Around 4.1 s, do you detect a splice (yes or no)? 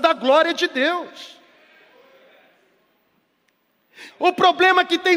yes